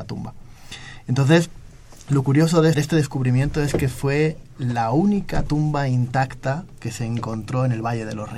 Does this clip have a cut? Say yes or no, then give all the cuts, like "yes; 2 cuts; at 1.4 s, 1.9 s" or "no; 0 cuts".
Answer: yes; 1 cut; at 2.7 s